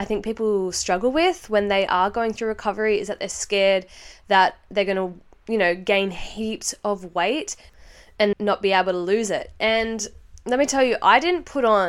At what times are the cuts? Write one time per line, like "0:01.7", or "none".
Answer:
0:08.3

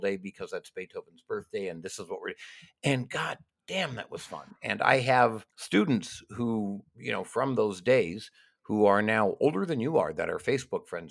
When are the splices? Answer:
0:05.5

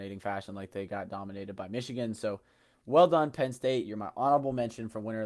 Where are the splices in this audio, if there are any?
none

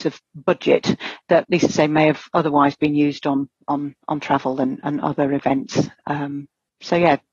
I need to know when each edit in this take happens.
0:01.4

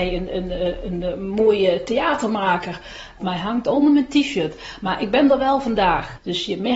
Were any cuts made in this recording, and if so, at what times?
0:03.2

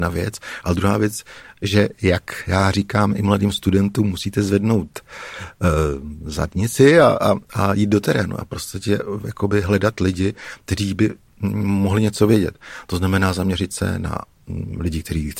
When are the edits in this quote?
none

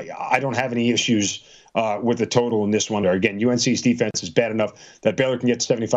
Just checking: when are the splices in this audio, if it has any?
0:03.0

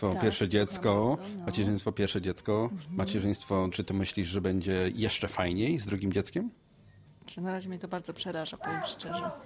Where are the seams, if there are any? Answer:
0:03.7
0:07.4

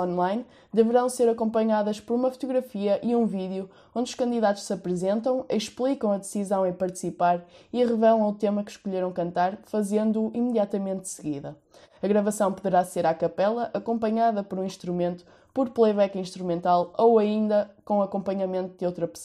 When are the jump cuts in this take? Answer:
none

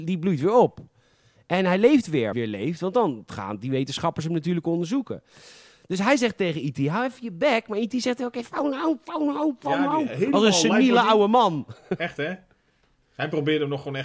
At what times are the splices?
0:02.3

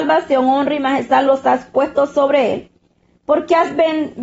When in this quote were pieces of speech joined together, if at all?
none

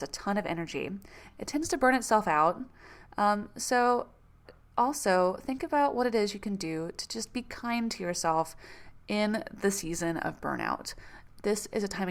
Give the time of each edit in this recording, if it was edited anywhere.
none

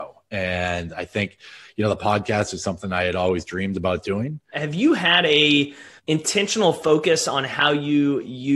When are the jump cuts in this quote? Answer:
0:04.5
0:06.0

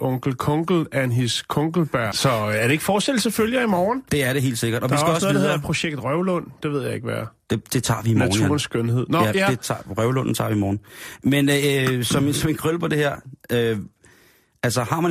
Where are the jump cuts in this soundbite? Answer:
0:02.1

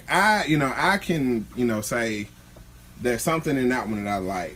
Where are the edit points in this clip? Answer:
none

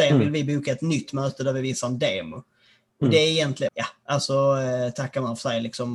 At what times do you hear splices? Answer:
0:03.7

